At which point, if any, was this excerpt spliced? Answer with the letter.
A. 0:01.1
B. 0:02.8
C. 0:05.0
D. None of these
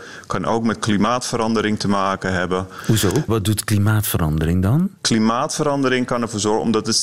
C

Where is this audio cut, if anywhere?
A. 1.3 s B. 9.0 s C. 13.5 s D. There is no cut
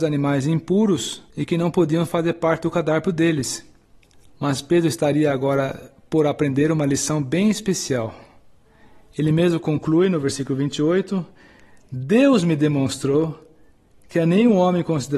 A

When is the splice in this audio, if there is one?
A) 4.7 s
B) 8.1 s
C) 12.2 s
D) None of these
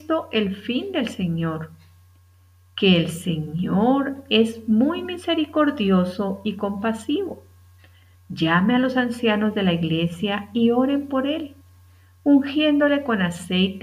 B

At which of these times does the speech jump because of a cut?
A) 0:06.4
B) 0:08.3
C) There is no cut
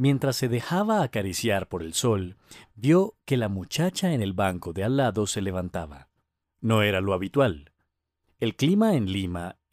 A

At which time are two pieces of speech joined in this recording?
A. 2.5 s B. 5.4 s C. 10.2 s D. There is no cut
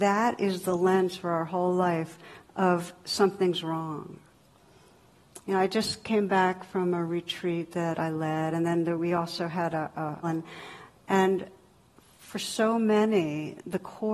C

